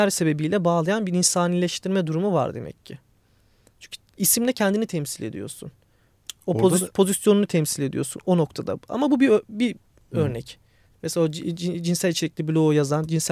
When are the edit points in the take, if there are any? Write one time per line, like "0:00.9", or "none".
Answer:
0:10.9

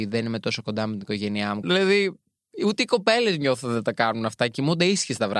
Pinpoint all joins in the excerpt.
0:01.6

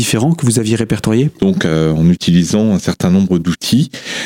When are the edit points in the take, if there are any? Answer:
0:01.4

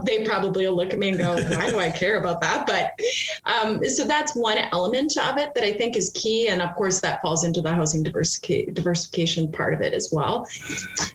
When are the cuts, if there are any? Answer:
none

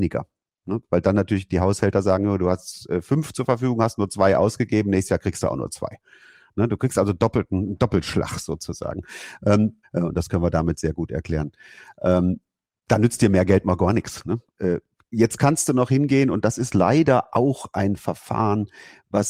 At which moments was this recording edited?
0:09.8

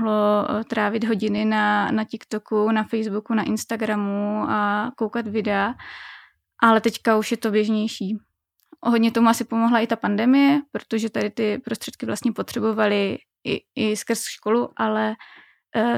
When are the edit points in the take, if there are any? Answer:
none

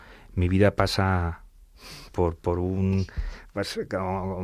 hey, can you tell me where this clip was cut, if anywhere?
0:02.1

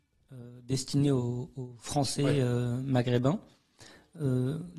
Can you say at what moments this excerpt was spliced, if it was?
none

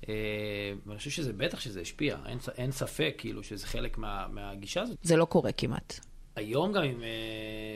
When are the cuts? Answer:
0:05.0

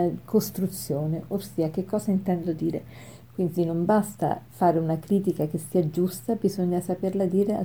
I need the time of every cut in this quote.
0:03.2

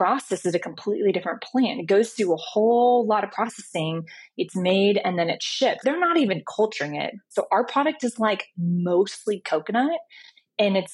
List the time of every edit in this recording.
0:05.8
0:07.3

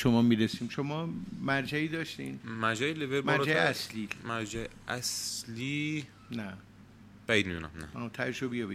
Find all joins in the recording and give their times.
none

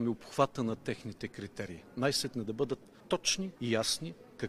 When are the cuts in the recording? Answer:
0:03.5

